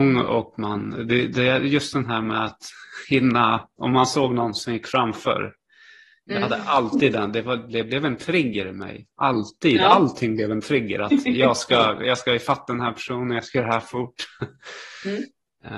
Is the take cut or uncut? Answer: uncut